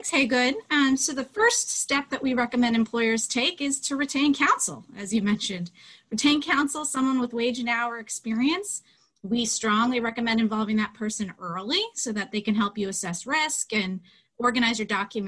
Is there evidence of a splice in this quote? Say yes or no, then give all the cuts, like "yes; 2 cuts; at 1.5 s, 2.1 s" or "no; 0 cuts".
no; 0 cuts